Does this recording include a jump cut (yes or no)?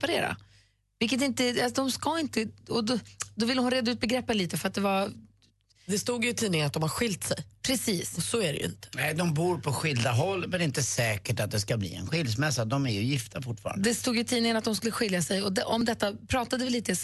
no